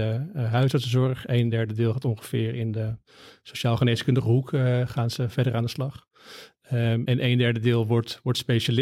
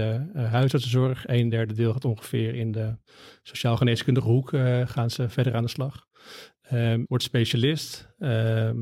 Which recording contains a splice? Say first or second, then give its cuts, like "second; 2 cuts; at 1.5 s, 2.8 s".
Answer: second; 1 cut; at 7.1 s